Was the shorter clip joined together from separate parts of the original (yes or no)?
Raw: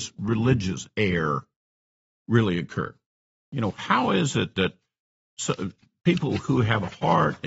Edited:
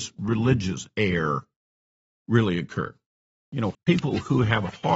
yes